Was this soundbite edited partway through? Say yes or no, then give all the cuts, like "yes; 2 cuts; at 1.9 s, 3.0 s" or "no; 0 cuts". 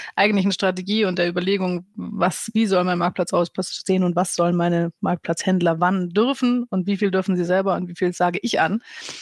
no; 0 cuts